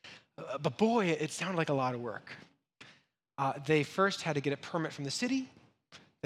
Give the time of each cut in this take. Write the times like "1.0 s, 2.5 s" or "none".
none